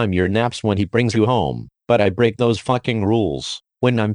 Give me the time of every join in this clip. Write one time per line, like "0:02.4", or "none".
0:01.8